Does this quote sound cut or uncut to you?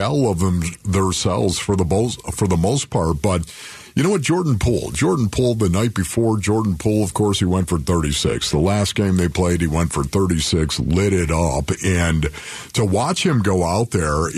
uncut